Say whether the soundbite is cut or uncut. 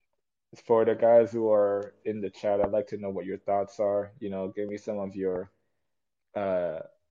uncut